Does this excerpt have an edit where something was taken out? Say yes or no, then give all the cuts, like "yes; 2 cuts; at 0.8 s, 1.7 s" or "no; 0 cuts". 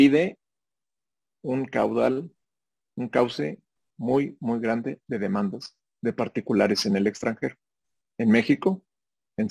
no; 0 cuts